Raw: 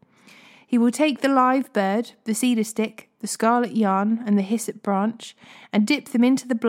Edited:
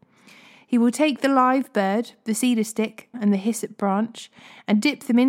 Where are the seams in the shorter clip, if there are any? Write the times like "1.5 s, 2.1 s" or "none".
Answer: 3.1 s